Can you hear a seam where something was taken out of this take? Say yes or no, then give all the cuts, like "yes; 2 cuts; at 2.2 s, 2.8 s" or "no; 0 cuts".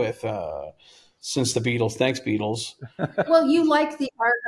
yes; 1 cut; at 3.3 s